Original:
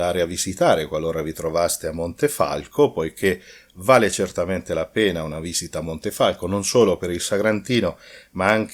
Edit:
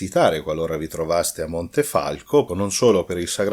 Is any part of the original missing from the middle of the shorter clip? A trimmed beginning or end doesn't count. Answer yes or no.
yes